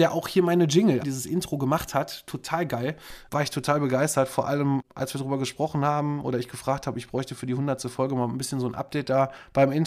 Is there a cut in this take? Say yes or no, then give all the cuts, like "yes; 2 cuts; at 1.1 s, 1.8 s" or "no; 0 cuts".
yes; 1 cut; at 1.0 s